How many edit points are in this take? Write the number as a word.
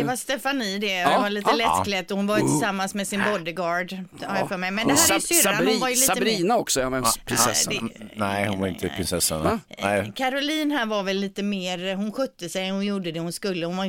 zero